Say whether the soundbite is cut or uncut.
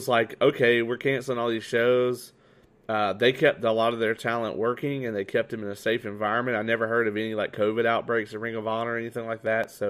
uncut